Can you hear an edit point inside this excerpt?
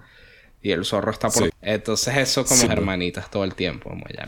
yes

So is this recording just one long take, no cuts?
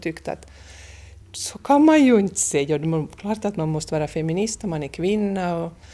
yes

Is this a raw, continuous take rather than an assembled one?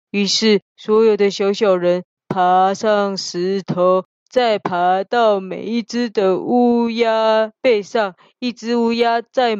yes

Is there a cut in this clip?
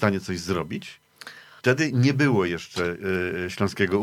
yes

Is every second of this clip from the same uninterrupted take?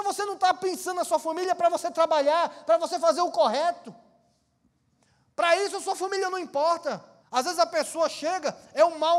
no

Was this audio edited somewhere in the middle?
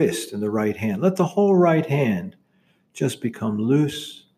no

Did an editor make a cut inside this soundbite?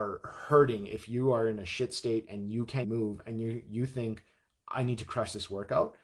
yes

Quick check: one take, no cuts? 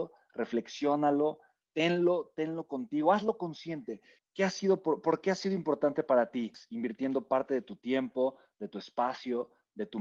no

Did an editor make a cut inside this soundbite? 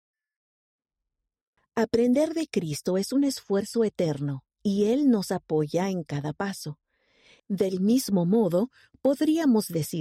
yes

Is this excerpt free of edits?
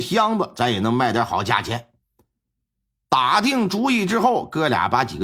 yes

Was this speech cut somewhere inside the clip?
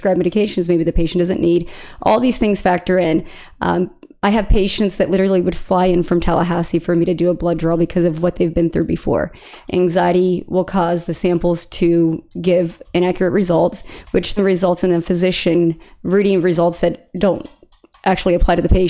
yes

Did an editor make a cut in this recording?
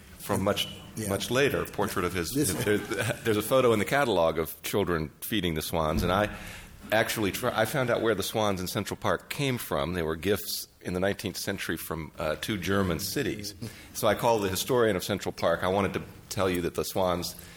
yes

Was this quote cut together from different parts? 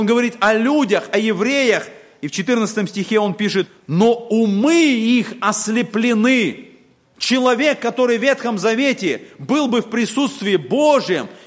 no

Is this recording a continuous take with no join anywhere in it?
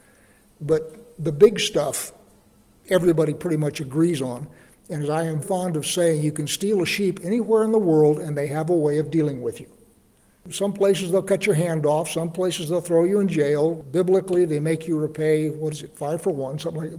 no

